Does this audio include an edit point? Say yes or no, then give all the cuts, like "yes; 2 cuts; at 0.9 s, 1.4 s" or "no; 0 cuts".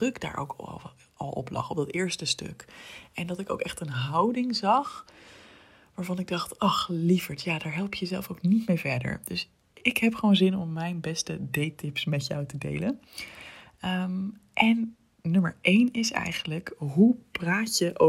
no; 0 cuts